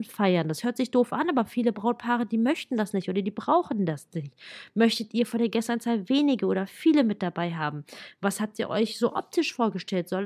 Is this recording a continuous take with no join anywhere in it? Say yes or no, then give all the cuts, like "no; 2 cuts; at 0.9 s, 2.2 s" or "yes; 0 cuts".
yes; 0 cuts